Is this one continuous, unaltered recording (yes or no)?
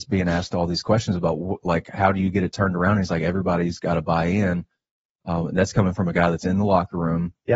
yes